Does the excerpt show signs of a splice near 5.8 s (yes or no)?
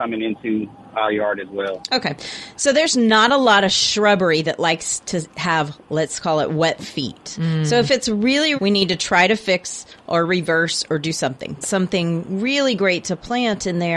no